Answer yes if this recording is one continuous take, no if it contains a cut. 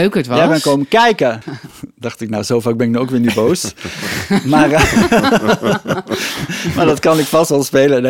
no